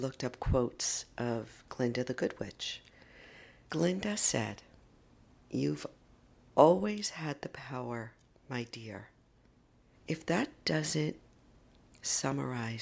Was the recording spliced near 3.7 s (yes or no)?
yes